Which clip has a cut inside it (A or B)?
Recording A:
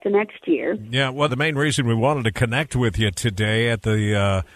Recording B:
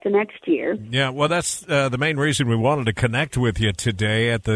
A